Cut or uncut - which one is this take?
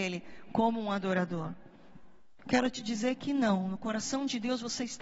cut